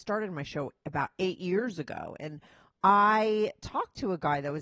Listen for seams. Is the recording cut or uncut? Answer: uncut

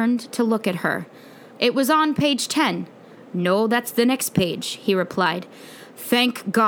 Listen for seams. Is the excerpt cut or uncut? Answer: cut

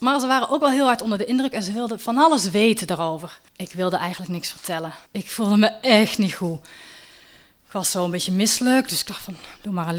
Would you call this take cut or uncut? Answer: cut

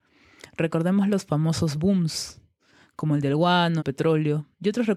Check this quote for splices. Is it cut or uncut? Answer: cut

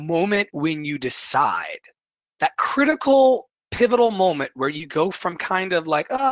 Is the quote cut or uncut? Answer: uncut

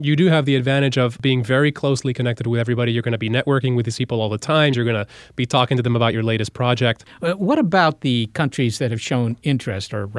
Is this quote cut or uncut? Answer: cut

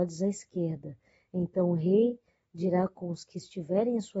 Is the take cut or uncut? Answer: uncut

